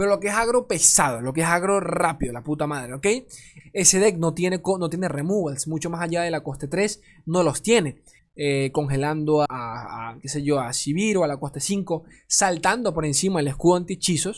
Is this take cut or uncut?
cut